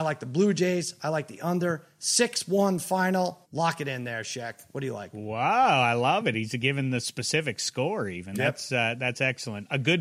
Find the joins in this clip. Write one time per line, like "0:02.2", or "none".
0:03.4